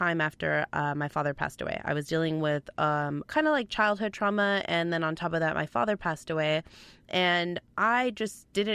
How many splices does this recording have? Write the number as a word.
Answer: one